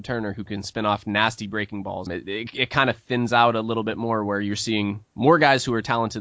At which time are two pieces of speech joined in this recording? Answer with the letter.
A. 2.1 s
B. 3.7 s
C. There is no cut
A